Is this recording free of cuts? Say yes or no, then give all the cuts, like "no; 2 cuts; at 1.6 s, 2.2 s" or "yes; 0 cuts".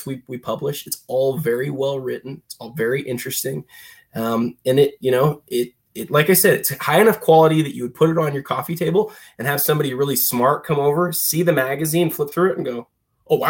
yes; 0 cuts